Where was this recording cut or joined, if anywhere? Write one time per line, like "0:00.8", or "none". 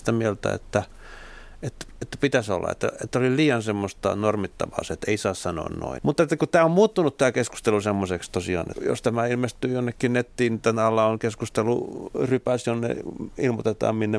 0:06.0
0:08.7